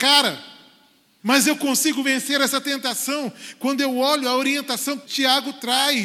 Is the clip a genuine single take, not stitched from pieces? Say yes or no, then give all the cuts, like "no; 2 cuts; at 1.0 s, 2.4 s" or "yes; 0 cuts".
no; 2 cuts; at 1.2 s, 5.0 s